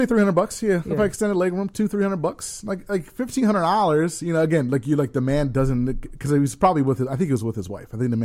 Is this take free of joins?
yes; 0 cuts

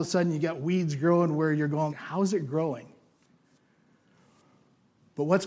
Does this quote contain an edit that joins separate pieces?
yes; 1 cut; at 1.9 s

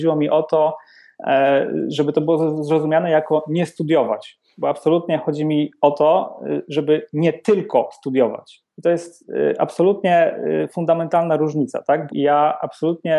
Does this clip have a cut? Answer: yes; 1 cut; at 12.1 s

